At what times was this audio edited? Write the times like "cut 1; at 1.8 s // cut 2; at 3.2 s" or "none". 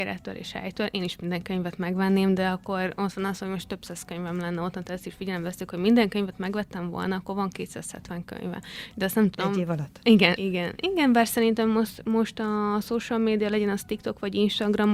cut 1; at 10.4 s